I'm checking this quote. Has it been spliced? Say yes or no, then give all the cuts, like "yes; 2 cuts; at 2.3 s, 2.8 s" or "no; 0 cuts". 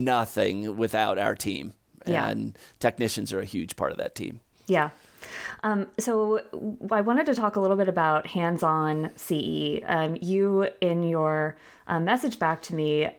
no; 0 cuts